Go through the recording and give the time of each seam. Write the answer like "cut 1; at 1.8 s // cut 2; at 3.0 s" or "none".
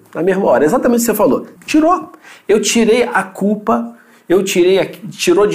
cut 1; at 1.6 s